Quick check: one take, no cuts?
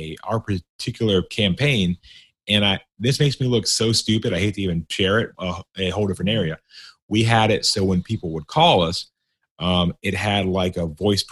no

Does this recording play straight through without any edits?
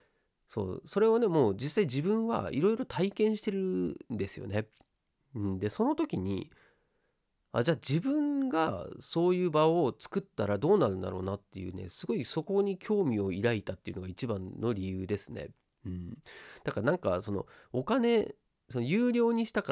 yes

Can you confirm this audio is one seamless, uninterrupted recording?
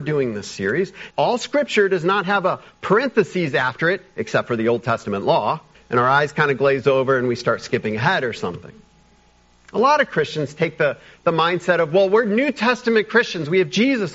no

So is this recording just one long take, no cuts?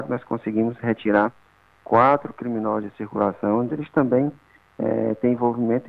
no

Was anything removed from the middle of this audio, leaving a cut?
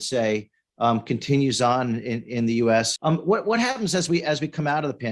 yes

